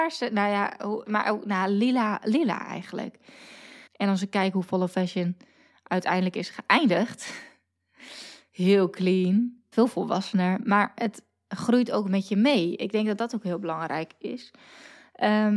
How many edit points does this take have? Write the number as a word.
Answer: three